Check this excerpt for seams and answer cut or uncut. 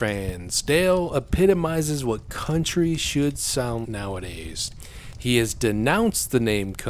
cut